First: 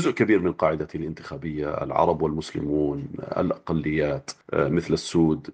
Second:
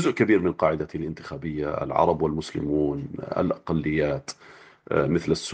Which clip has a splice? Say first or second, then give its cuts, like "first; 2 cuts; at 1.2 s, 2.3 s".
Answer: first; 1 cut; at 4.4 s